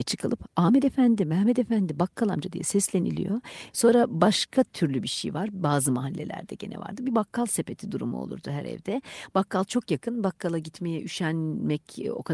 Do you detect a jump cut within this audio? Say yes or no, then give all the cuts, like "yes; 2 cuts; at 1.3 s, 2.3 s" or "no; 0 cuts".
yes; 1 cut; at 3.7 s